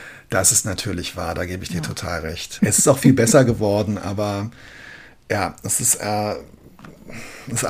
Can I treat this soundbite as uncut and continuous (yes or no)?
no